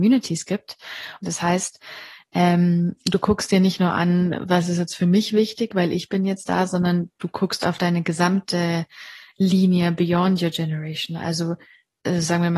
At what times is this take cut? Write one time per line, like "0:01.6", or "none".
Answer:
0:01.2